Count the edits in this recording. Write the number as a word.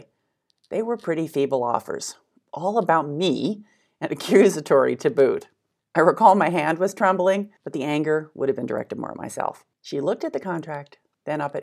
three